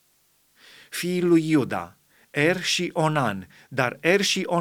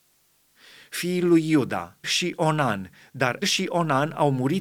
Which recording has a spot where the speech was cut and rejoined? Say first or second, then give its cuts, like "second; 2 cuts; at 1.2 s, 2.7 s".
second; 2 cuts; at 2.0 s, 3.4 s